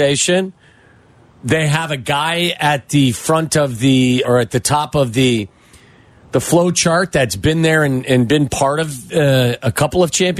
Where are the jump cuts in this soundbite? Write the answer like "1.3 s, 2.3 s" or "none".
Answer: 4.2 s